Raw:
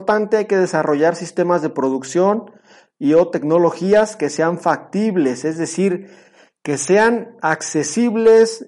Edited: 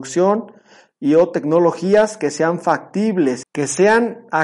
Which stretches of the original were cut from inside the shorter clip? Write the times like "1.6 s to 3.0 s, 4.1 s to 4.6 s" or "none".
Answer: 5.4 s to 6.5 s